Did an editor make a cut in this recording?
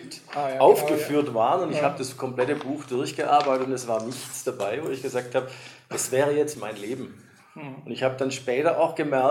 yes; 1 cut; at 6.5 s

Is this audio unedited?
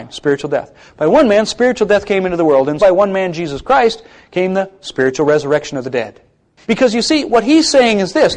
no; 2 cuts; at 2.8 s, 6.6 s

